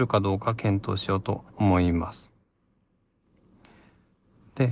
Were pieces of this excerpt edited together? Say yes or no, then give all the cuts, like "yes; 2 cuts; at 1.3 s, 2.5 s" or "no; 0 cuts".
yes; 1 cut; at 1.5 s